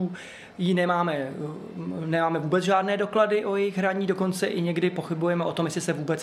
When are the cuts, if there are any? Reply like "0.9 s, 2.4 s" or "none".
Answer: none